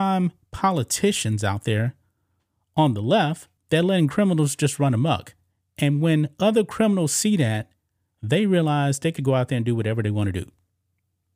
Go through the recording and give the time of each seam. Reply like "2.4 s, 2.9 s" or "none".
3.6 s, 9.2 s